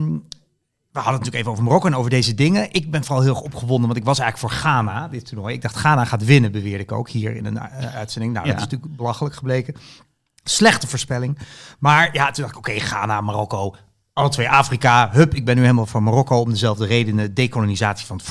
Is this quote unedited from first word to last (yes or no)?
yes